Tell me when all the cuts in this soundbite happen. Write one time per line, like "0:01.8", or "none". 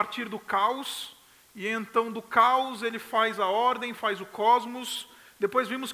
none